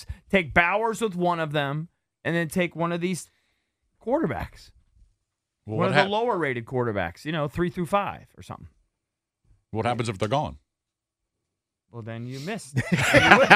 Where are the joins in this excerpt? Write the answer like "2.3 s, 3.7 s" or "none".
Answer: none